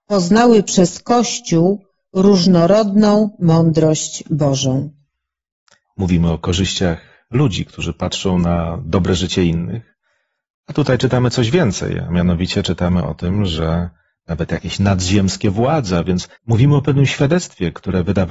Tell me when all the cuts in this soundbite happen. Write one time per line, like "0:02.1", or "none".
0:16.4